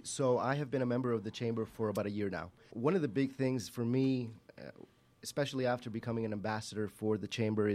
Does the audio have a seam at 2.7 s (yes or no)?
yes